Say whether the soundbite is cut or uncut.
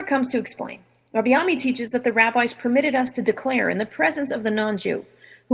uncut